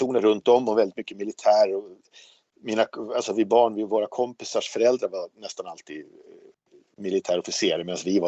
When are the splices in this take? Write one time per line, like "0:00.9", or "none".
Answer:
none

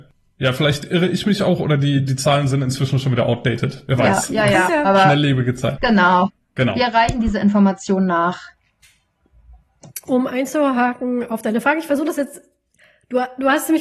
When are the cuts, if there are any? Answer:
0:05.8

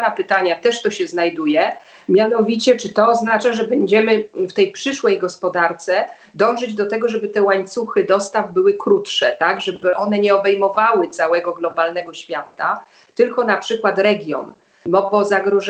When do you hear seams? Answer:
none

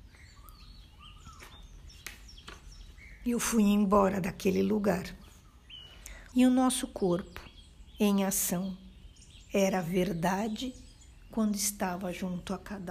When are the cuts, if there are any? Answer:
0:06.3

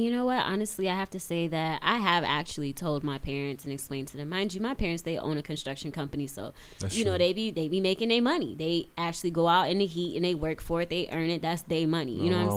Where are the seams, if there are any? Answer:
none

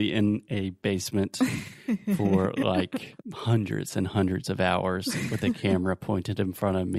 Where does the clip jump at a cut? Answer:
0:03.2

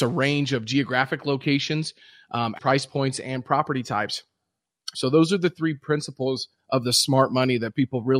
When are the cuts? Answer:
0:02.6
0:04.9

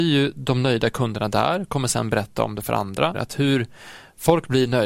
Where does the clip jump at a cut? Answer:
0:03.1

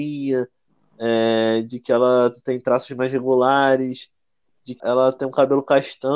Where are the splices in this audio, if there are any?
0:04.8

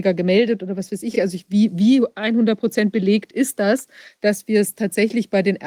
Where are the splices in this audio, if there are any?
none

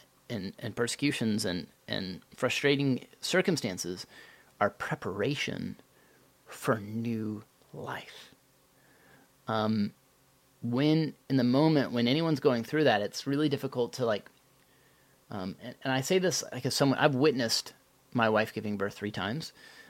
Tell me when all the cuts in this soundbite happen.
none

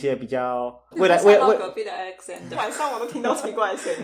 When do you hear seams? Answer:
0:00.9
0:02.5

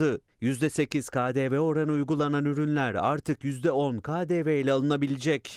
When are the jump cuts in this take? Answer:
none

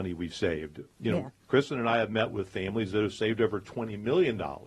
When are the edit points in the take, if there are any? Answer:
none

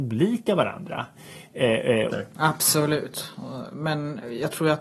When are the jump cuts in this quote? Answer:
0:02.1

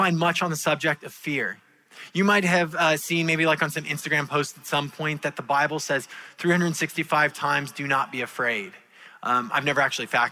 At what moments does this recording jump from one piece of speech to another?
none

